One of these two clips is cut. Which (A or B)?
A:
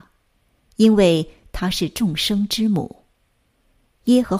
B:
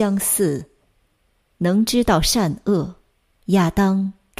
B